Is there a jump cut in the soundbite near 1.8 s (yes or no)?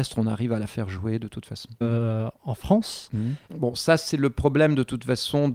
yes